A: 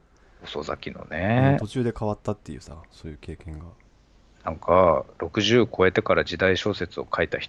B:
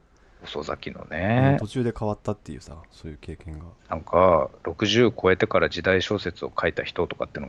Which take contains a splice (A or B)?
B